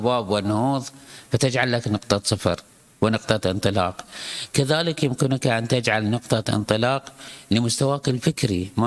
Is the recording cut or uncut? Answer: uncut